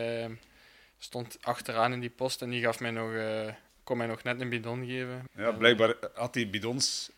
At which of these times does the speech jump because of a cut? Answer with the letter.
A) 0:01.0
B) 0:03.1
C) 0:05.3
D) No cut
C